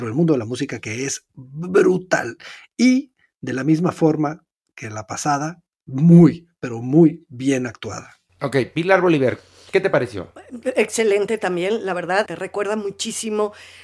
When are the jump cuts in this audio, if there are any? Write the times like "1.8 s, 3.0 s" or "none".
12.3 s